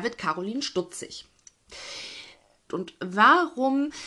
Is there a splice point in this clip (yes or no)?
yes